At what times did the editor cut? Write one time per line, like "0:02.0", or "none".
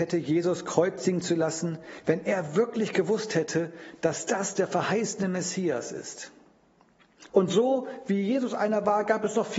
0:07.3